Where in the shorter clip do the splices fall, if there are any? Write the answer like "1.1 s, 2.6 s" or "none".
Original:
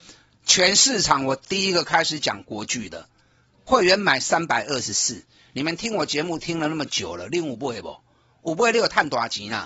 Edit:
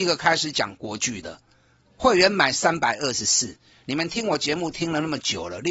none